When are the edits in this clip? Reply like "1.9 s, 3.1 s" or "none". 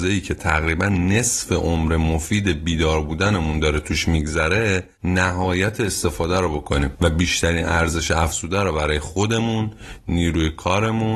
4.9 s